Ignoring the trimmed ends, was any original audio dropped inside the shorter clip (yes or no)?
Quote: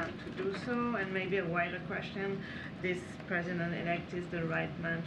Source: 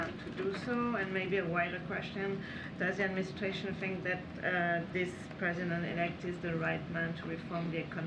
yes